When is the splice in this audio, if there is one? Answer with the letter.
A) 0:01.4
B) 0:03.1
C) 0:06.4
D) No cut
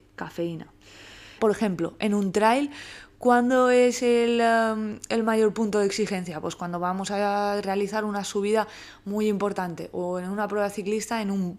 A